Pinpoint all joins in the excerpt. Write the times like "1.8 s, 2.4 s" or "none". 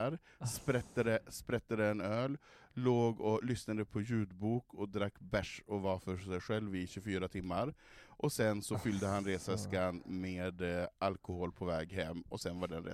none